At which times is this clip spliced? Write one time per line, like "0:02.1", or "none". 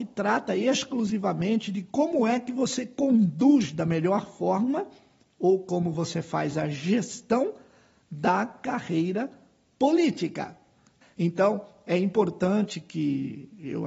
0:11.0

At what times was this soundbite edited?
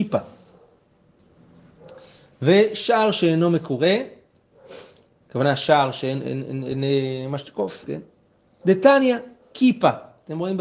0:06.2
0:08.6

